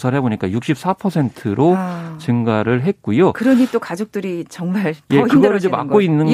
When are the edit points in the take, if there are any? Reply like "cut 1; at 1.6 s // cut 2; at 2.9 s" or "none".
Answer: none